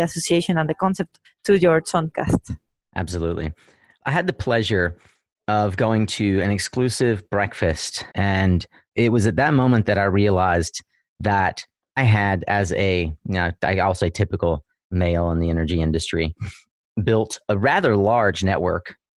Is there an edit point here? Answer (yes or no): yes